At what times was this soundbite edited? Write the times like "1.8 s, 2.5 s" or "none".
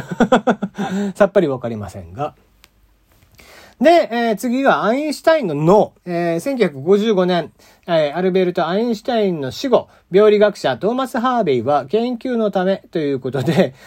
6.0 s